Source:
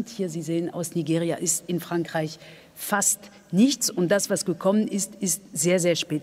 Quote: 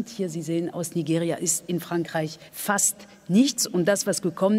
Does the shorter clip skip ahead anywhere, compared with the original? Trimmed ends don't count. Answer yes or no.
yes